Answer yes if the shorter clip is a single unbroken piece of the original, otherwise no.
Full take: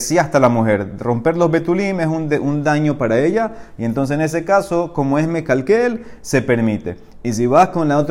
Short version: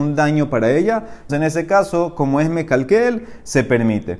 no